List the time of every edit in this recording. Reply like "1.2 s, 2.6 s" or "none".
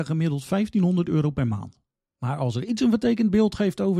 2.1 s